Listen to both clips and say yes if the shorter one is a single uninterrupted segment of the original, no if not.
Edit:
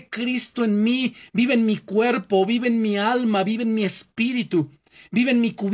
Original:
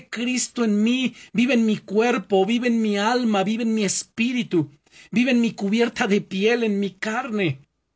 yes